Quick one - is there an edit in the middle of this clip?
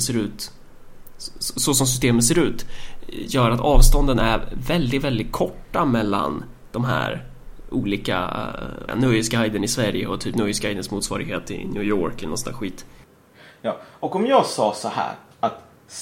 yes; 1 cut; at 8.9 s

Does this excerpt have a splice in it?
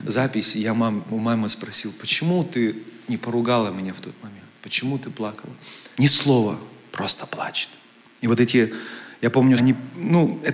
yes; 2 cuts; at 5.9 s, 9.6 s

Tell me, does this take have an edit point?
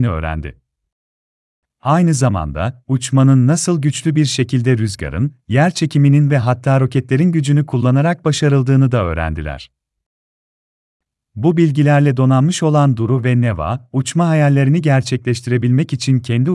no; 0 cuts

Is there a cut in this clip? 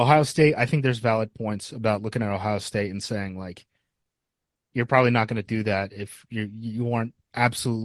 no; 0 cuts

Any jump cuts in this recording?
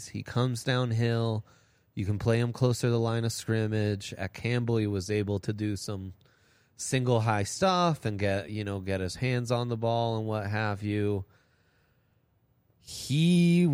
no; 0 cuts

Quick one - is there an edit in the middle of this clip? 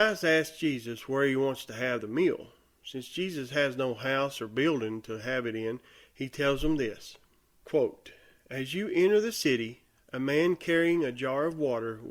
yes; 1 cut; at 7.6 s

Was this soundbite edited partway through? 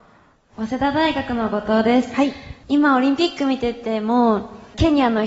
no; 0 cuts

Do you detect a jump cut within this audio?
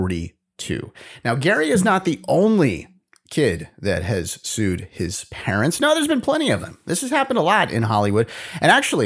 no; 0 cuts

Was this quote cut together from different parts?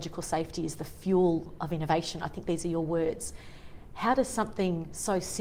no; 0 cuts

